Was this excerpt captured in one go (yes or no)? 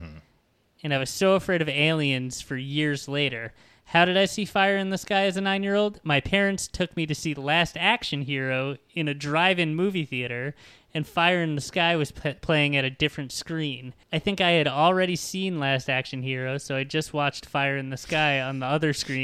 no